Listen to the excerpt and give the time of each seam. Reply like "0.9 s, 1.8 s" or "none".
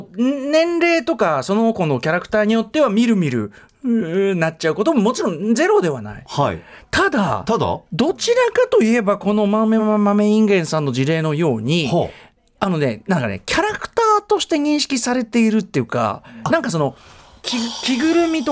9.8 s